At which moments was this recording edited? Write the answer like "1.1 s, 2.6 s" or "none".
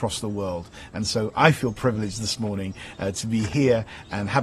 none